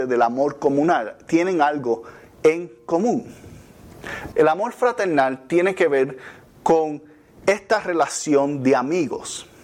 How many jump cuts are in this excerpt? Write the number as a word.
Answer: one